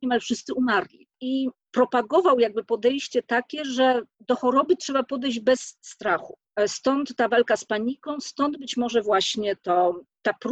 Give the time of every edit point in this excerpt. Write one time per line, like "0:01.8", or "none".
none